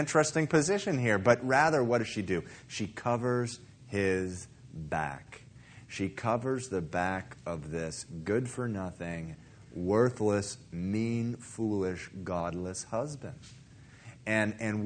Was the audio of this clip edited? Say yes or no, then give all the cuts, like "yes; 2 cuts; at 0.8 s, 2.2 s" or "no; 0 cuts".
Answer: no; 0 cuts